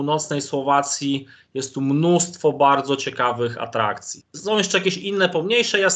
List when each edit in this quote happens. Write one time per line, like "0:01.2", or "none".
0:04.2